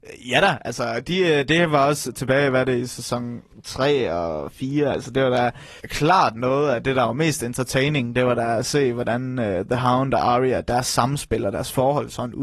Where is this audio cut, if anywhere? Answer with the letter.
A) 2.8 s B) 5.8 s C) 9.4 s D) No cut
B